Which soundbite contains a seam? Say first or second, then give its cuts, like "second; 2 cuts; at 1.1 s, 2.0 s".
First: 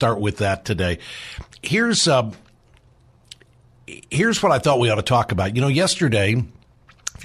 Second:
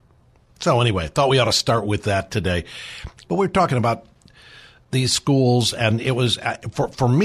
second; 1 cut; at 3.2 s